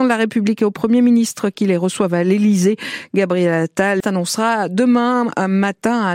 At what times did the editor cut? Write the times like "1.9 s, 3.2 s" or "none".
4.0 s